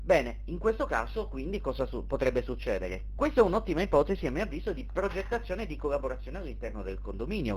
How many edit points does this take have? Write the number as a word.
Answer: one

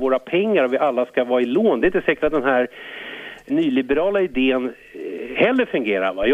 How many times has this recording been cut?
one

